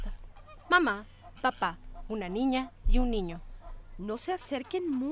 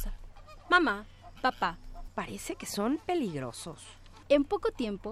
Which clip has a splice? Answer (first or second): second